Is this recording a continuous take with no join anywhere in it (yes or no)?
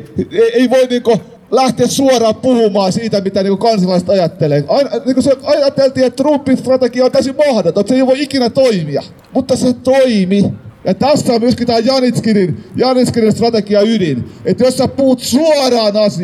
yes